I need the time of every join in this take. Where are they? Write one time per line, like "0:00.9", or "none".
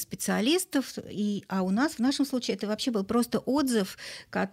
none